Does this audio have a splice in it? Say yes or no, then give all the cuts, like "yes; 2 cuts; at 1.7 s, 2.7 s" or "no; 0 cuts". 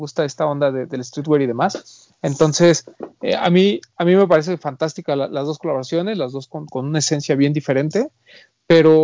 no; 0 cuts